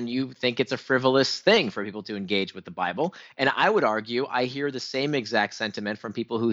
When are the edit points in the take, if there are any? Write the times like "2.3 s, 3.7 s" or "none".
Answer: none